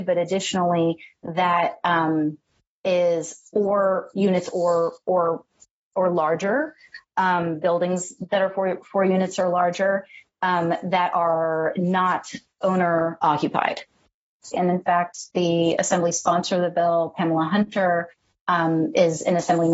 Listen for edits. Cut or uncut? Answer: cut